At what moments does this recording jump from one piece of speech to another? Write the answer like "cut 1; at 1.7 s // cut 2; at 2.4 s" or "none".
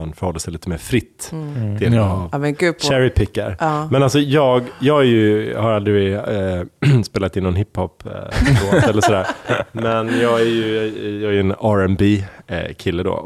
none